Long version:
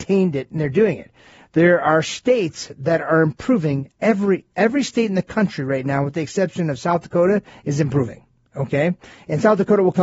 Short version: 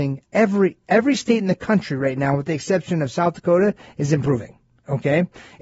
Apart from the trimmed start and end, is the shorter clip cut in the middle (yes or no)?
no